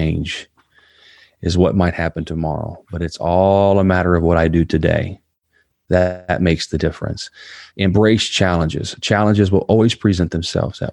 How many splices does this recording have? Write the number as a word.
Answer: zero